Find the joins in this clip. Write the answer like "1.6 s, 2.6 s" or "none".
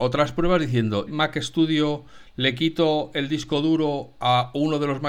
1.1 s

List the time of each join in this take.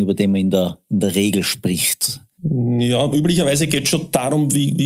none

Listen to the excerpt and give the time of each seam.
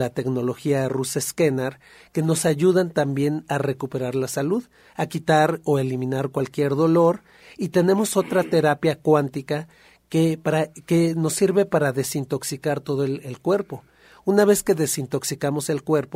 none

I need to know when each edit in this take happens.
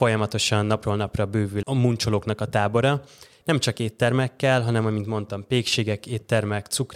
1.6 s, 3.4 s

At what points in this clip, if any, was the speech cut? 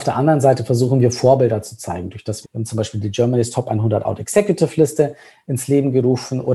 2.4 s

